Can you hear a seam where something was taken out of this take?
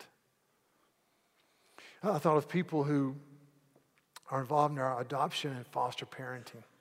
no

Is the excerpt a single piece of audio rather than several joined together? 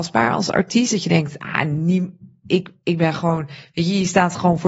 yes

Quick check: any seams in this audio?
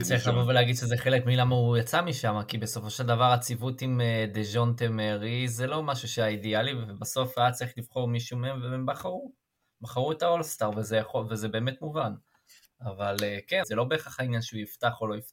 yes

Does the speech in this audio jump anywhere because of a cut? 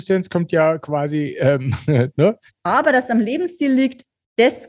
yes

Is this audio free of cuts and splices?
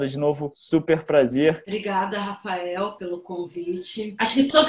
no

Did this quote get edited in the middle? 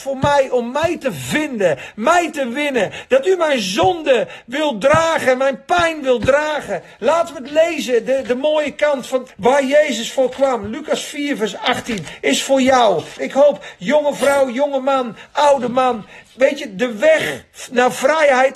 yes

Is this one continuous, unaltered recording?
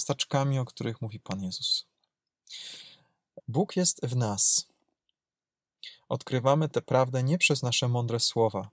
no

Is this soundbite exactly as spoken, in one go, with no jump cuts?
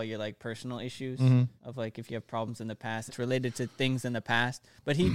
no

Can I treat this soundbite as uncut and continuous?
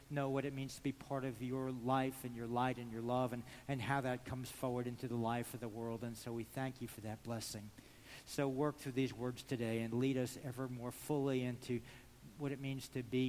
yes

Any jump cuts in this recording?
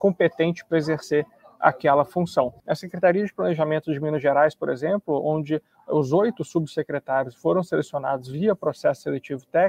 yes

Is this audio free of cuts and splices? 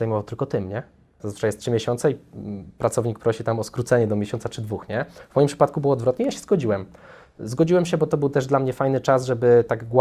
no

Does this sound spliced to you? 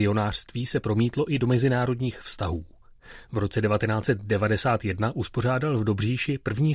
no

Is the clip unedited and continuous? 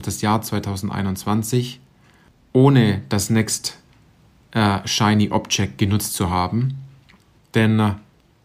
no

